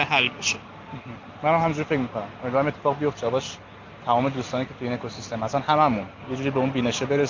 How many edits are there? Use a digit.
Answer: 1